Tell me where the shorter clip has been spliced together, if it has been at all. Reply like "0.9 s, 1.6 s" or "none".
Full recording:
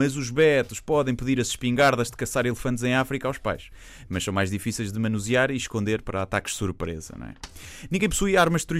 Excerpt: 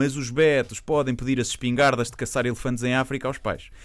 none